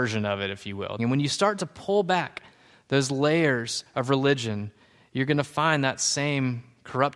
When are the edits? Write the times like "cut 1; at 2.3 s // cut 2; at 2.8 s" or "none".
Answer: cut 1; at 1.0 s